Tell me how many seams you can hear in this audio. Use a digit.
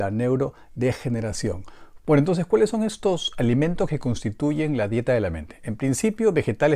1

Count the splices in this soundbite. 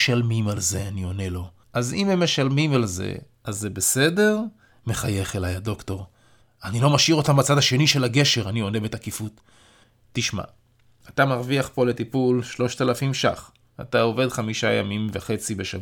1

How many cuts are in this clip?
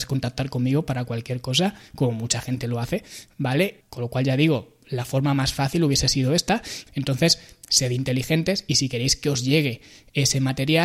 2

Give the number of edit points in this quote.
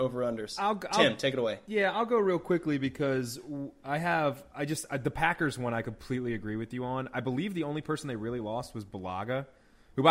0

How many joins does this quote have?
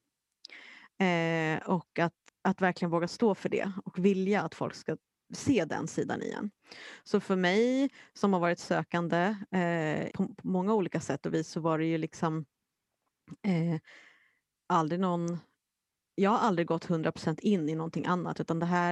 3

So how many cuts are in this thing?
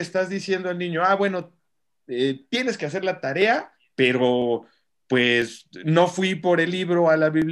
0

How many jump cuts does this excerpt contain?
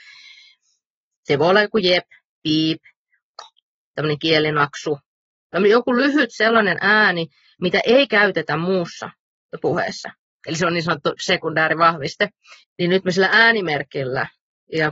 3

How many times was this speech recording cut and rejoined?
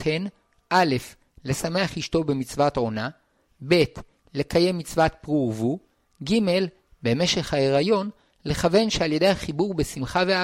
0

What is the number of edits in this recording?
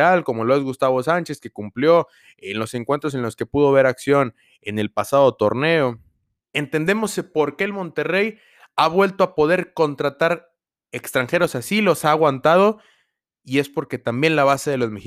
1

